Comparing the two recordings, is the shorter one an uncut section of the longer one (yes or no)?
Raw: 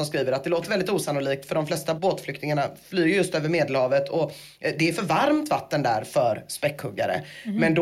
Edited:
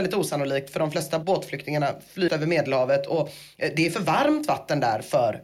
no